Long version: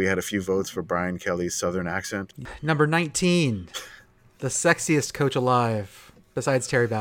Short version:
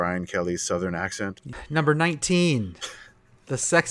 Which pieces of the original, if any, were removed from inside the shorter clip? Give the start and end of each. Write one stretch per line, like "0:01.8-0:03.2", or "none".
none